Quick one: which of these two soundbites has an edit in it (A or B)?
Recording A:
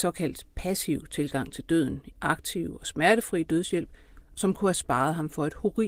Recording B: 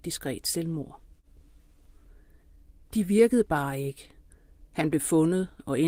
A